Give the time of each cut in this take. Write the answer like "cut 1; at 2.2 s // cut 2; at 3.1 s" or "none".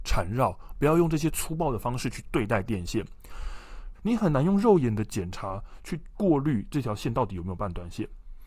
cut 1; at 3.9 s